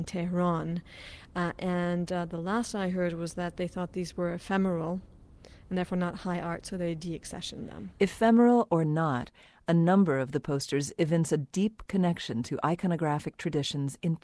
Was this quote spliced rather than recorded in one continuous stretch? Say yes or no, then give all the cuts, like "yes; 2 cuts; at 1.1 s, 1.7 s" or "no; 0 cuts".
no; 0 cuts